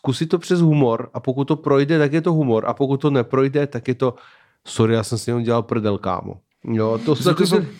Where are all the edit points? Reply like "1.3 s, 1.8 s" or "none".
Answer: none